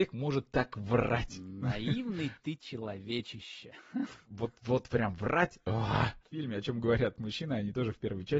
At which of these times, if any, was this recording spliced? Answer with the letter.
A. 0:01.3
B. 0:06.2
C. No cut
B